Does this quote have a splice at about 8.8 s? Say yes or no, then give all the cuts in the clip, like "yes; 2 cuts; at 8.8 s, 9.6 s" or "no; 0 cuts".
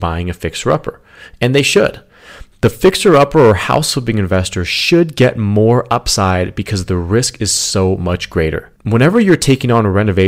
yes; 1 cut; at 8.8 s